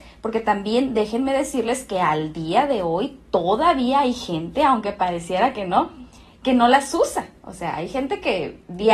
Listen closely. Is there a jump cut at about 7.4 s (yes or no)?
no